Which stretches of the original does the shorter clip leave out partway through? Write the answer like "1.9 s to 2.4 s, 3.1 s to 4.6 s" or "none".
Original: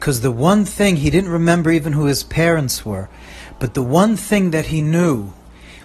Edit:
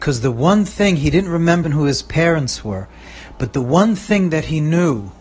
1.6 s to 1.8 s